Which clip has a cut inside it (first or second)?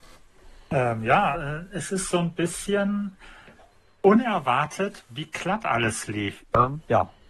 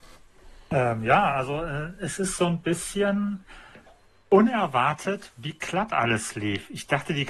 first